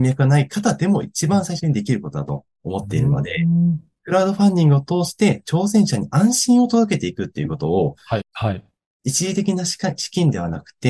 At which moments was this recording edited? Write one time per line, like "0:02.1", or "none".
0:08.2